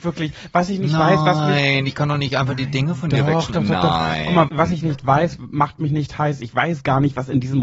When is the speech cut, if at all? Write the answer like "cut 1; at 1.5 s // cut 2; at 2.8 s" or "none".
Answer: cut 1; at 4.5 s